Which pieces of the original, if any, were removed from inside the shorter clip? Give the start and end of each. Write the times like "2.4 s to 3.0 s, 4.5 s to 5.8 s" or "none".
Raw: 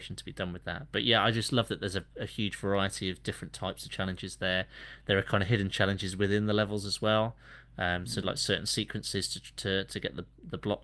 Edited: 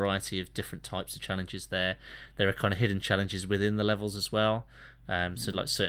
none